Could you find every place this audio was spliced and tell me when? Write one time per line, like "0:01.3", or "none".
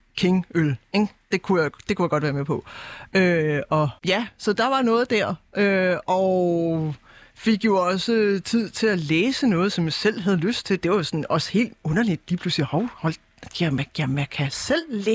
0:04.0